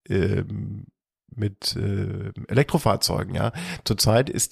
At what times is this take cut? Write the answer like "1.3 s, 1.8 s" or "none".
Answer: none